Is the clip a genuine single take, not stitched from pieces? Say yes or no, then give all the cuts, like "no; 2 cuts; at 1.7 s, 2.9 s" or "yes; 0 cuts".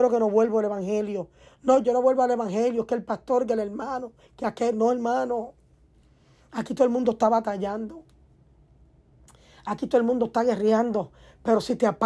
yes; 0 cuts